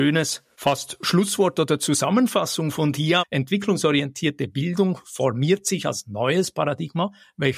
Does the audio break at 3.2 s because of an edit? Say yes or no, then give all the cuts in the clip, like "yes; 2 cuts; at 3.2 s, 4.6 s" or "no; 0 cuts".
yes; 1 cut; at 3.2 s